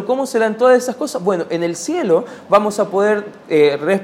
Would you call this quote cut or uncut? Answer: uncut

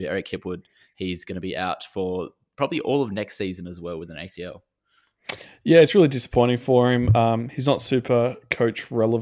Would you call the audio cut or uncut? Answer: uncut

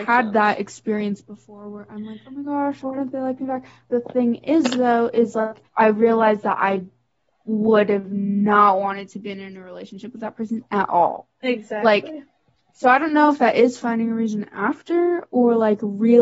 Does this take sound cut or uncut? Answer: cut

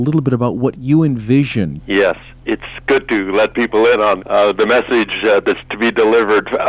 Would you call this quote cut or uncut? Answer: cut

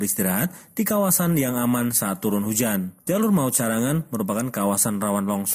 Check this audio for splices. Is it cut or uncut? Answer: uncut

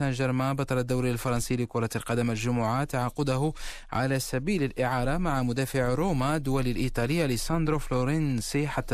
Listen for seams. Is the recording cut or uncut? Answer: uncut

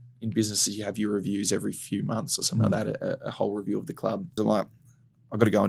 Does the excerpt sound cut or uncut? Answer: cut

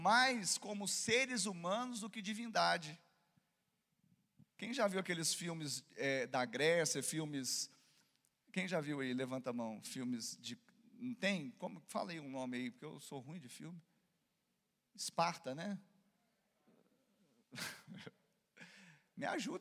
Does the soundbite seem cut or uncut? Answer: uncut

